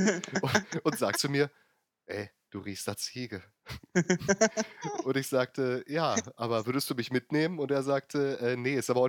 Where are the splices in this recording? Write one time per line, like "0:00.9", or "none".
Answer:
0:01.1